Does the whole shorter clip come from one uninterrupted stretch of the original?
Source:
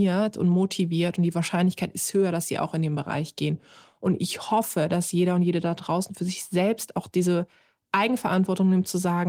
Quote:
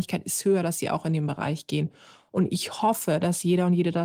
yes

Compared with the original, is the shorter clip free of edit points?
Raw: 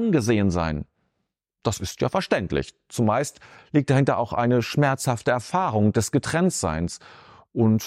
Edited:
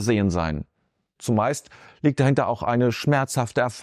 no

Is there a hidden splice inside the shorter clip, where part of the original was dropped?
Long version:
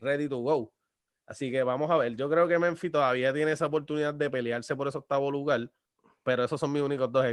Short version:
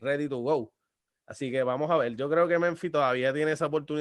no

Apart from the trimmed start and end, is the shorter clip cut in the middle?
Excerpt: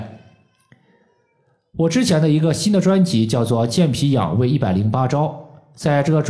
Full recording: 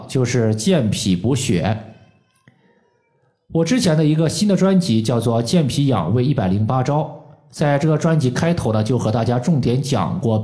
no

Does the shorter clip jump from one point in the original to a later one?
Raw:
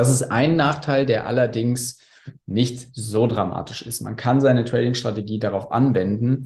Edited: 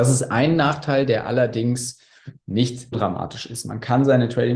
yes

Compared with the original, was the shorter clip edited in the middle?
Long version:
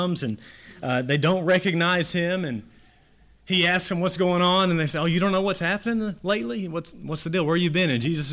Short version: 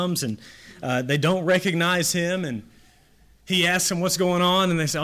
no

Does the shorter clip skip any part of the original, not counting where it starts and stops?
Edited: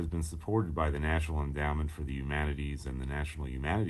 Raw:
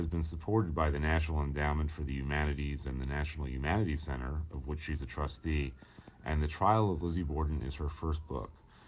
no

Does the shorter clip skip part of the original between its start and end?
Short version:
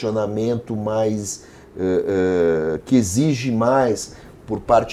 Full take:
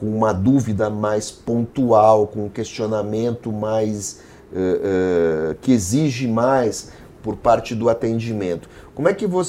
no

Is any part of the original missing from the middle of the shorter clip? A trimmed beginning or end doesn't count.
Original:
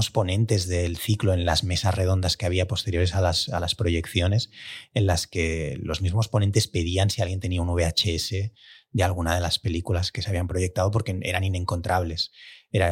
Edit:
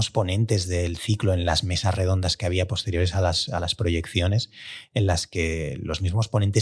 no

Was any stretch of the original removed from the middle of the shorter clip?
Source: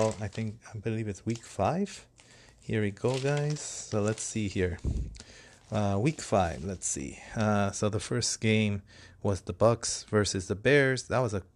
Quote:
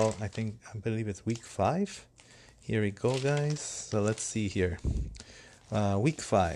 no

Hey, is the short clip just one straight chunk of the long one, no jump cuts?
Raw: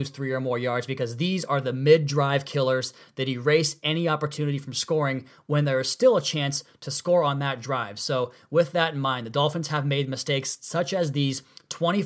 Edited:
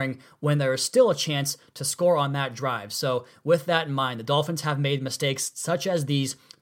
yes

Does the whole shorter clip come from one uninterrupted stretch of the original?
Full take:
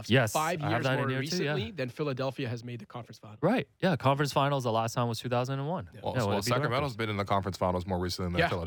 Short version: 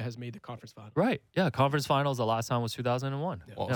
yes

